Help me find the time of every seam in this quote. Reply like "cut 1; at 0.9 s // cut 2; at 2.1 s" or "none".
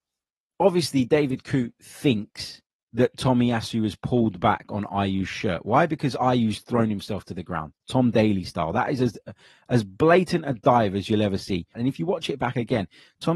cut 1; at 7.8 s // cut 2; at 11.7 s